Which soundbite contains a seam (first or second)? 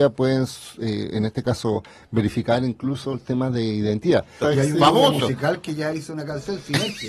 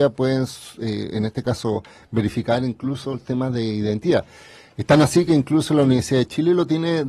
first